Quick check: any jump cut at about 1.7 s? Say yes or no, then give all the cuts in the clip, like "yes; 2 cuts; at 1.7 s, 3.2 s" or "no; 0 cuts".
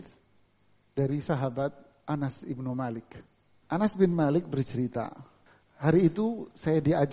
no; 1 cut; at 3.6 s